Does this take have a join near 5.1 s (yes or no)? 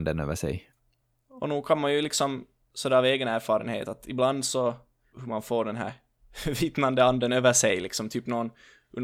yes